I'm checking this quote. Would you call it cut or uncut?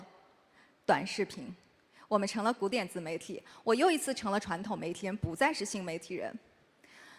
uncut